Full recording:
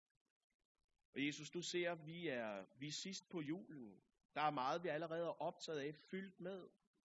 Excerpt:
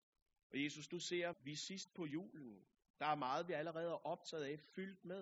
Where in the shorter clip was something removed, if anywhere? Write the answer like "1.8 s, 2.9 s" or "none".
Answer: 1.3 s